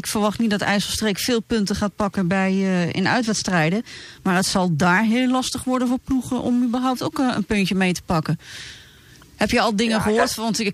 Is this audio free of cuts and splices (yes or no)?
yes